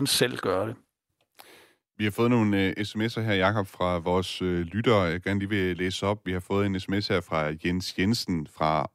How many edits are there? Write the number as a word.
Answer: zero